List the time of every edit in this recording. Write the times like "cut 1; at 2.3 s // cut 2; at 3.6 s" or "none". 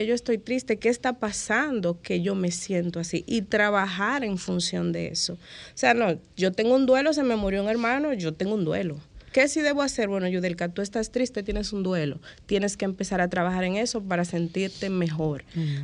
cut 1; at 9.3 s